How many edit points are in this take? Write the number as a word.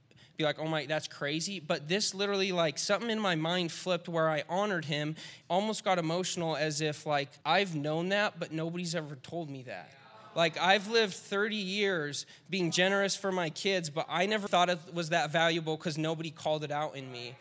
three